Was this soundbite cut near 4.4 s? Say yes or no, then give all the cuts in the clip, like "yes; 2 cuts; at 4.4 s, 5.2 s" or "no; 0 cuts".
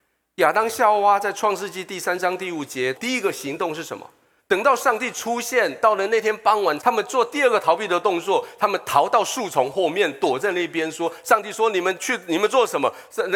yes; 3 cuts; at 2.9 s, 4.4 s, 6.8 s